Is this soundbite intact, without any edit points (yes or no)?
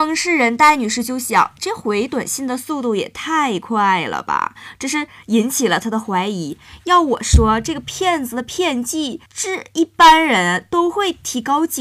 no